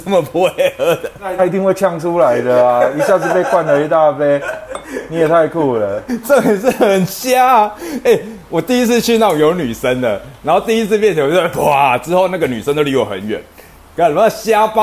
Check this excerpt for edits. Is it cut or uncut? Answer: uncut